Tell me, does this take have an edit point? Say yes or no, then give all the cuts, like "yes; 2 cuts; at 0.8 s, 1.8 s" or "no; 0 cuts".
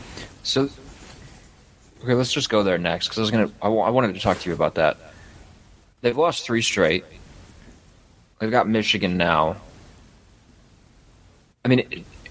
no; 0 cuts